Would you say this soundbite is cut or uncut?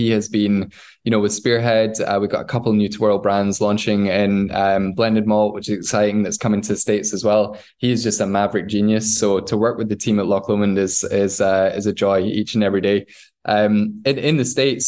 uncut